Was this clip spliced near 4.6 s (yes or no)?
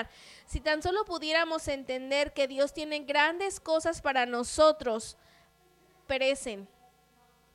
no